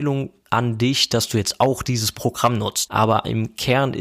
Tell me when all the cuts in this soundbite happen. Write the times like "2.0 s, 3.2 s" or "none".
2.9 s